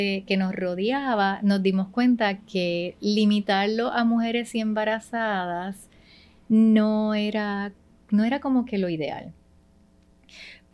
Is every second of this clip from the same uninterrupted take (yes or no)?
yes